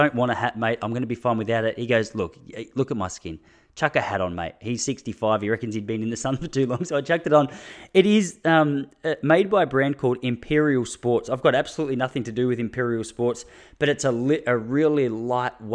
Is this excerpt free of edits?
yes; 0 cuts

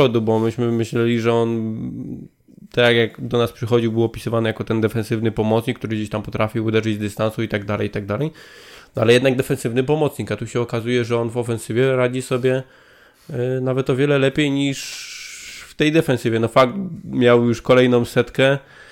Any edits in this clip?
no; 0 cuts

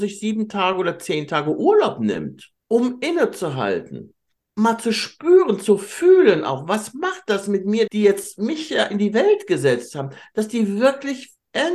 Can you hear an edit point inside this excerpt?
yes; 3 cuts; at 2.6 s, 4.4 s, 7.9 s

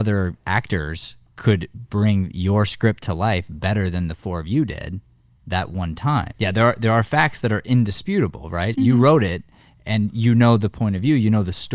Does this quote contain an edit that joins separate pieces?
yes; 2 cuts; at 6.3 s, 8.7 s

